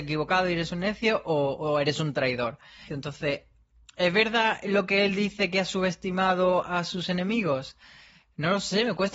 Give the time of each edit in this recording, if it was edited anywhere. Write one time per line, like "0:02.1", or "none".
0:02.9